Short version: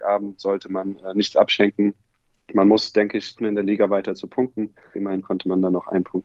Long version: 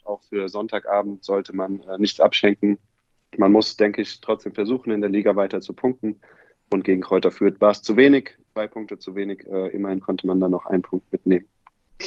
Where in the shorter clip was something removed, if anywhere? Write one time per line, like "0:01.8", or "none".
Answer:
0:03.4
0:04.9